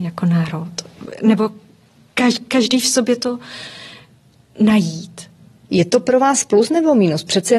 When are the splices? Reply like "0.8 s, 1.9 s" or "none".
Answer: 5.7 s